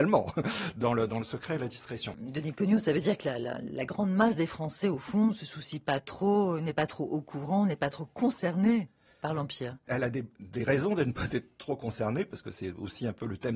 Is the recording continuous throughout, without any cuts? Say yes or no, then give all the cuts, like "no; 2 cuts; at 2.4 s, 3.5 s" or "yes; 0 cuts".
yes; 0 cuts